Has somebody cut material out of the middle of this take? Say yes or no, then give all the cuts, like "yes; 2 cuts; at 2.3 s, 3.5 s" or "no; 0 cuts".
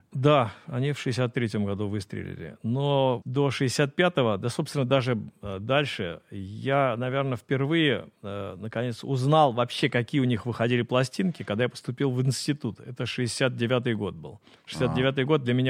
yes; 1 cut; at 3.2 s